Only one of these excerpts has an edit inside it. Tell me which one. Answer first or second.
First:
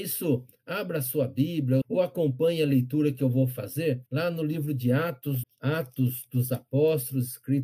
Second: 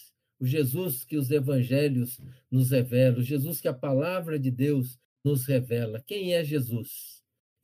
first